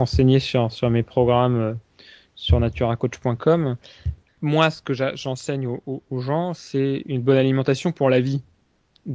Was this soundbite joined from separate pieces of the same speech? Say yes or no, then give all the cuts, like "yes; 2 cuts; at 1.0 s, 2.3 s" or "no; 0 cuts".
no; 0 cuts